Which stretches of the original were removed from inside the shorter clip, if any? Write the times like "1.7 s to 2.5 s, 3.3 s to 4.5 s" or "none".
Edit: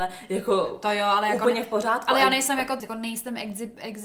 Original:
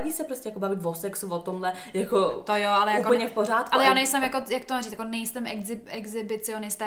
4.4 s to 4.9 s